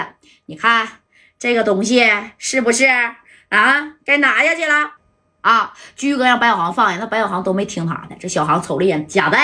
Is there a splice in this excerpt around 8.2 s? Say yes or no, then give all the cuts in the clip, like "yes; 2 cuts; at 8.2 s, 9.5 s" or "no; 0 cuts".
no; 1 cut; at 5.0 s